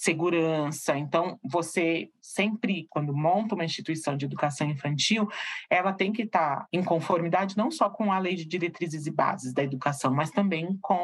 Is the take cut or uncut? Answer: cut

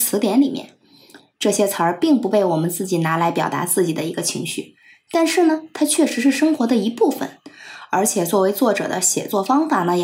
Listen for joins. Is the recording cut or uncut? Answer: uncut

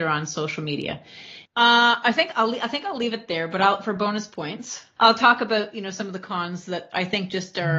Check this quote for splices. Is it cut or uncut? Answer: cut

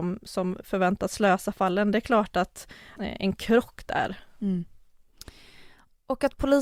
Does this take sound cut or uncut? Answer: cut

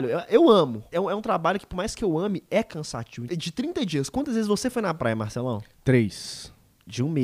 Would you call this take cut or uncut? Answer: cut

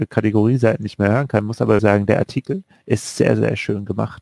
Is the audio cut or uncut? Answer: cut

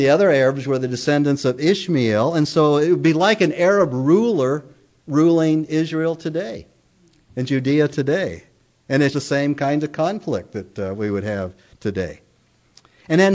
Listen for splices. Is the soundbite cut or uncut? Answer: cut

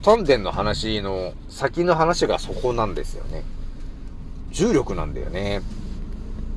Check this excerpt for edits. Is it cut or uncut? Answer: uncut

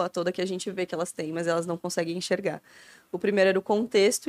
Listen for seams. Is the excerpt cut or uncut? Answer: uncut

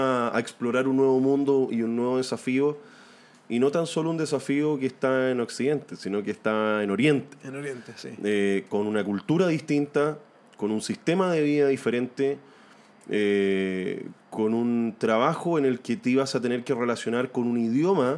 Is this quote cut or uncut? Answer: uncut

